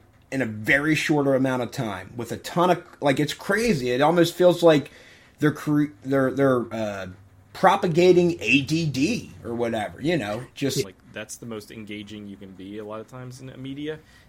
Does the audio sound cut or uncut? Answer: cut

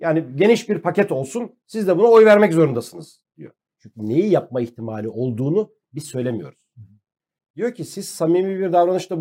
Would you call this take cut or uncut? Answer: cut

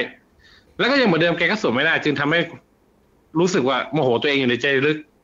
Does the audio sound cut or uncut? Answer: uncut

